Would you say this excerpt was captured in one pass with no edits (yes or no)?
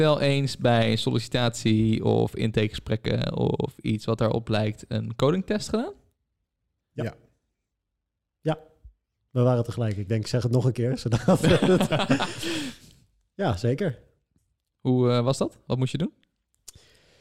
yes